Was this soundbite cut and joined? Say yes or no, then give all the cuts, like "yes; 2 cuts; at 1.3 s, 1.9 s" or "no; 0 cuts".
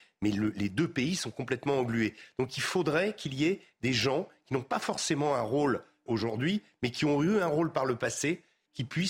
yes; 1 cut; at 6.1 s